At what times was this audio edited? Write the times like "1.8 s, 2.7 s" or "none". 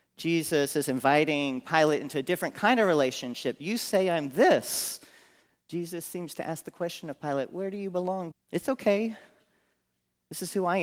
5.6 s, 8.3 s